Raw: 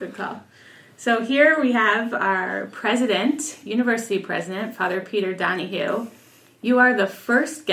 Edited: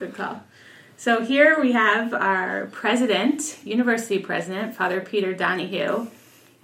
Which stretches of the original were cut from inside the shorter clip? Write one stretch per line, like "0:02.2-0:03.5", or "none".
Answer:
none